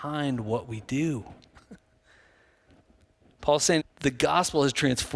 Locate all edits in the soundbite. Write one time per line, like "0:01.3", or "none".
0:03.8